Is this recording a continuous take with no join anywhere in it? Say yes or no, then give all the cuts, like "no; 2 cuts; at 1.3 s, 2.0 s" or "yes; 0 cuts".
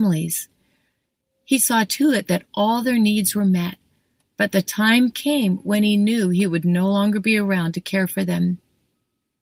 yes; 0 cuts